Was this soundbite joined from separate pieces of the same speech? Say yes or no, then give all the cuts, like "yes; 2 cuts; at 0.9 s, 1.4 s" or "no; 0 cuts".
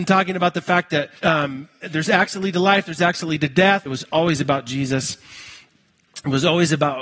yes; 2 cuts; at 1.2 s, 3.9 s